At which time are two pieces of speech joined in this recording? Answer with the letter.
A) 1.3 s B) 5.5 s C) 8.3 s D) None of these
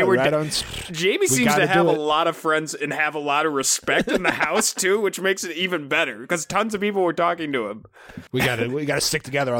C